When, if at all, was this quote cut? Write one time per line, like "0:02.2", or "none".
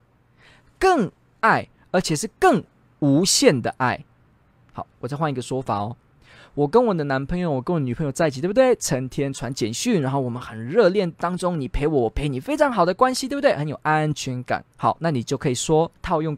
0:14.6